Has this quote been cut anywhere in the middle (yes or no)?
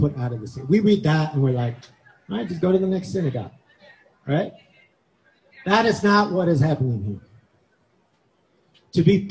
no